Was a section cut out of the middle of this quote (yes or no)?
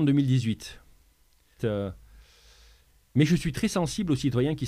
yes